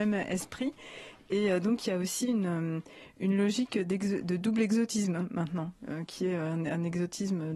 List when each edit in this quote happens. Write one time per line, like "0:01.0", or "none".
none